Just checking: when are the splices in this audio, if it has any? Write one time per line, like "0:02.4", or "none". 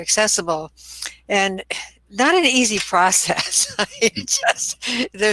none